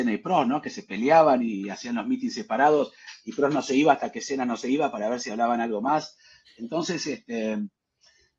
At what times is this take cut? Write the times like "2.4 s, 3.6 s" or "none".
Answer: none